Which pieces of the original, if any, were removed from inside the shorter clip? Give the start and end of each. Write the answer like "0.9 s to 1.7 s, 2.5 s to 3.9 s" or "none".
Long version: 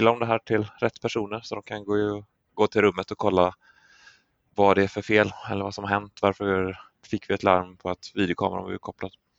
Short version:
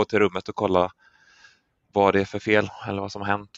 none